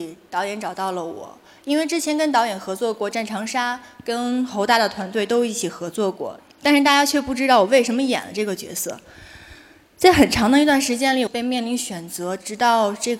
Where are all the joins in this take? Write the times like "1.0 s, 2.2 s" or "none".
6.4 s, 11.3 s

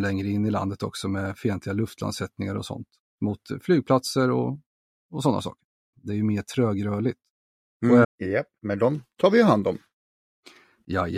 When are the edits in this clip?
5.9 s, 8.0 s

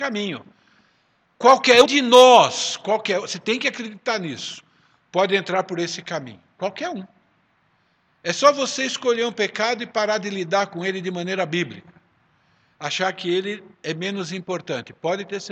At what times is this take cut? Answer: 1.9 s

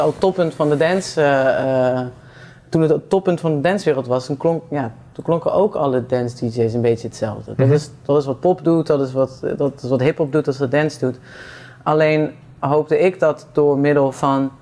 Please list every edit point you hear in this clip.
none

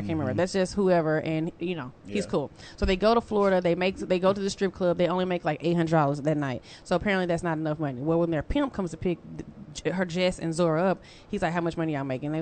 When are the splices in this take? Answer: none

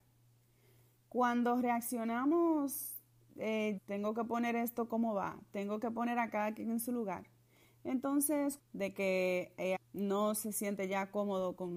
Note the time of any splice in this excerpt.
3.8 s, 8.6 s, 9.7 s

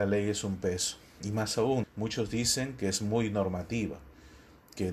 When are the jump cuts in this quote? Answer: 1.8 s

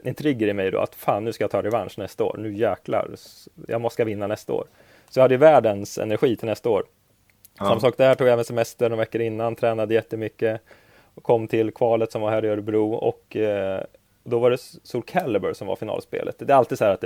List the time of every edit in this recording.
none

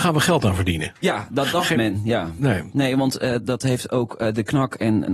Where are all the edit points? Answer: 2.7 s

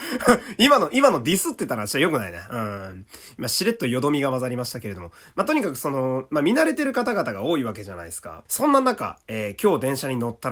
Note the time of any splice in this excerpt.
8.5 s

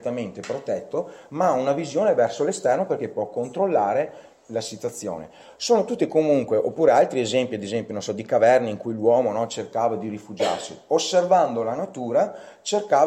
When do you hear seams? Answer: none

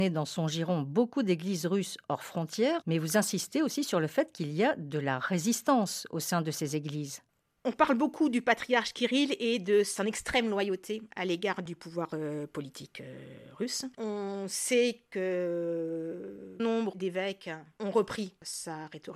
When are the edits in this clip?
2.8 s, 13.9 s, 16.6 s

